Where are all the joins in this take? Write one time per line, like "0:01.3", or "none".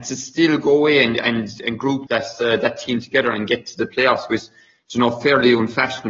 0:02.1